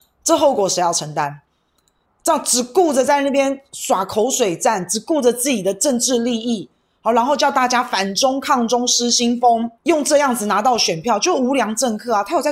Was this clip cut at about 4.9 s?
no; 2 cuts; at 2.1 s, 9.8 s

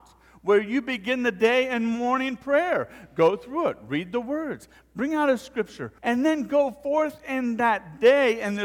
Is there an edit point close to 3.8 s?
no; 1 cut; at 6.0 s

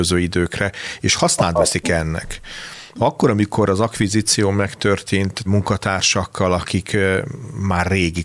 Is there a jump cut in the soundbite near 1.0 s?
no; 2 cuts; at 2.9 s, 5.5 s

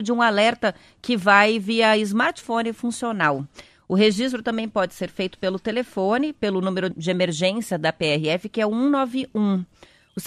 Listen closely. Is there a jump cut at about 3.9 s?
no; 1 cut; at 6.9 s

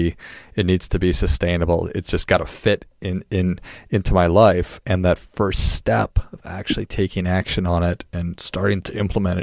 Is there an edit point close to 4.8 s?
no; 0 cuts

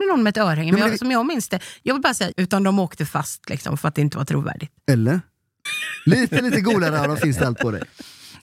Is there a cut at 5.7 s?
yes; 2 cuts; at 2.3 s, 5.7 s

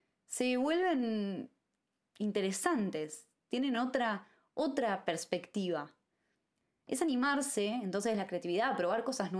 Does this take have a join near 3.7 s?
no; 0 cuts

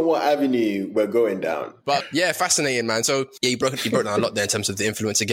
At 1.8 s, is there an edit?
yes; 1 cut; at 1.8 s

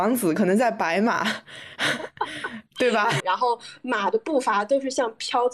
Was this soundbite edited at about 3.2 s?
yes; 1 cut; at 3.2 s

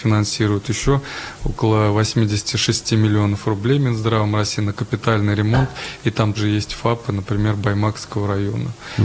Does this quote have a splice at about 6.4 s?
yes; 1 cut; at 6.4 s

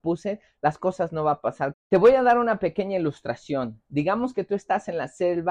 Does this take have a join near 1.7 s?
yes; 1 cut; at 1.7 s

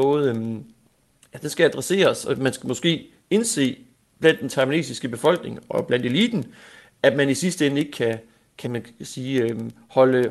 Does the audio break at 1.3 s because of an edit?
no; 1 cut; at 8.6 s

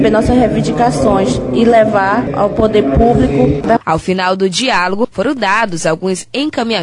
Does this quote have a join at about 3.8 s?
yes; 1 cut; at 3.8 s

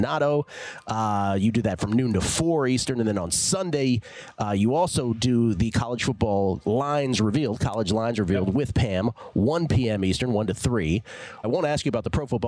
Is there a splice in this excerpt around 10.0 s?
no; 1 cut; at 11.4 s

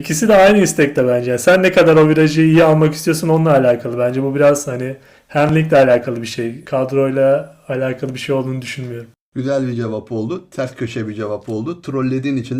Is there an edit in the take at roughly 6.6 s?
no; 0 cuts

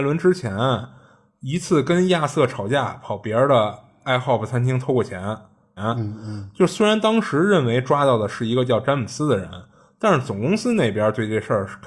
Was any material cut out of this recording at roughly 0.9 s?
no; 1 cut; at 5.8 s

